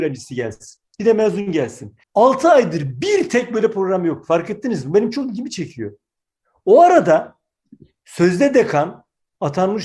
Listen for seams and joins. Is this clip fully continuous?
no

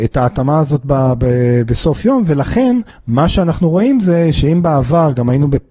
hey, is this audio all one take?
yes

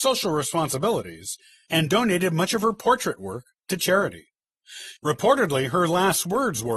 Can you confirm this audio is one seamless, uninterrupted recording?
no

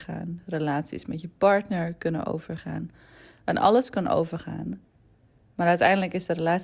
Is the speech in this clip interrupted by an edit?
no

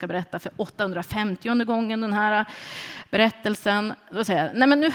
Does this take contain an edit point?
no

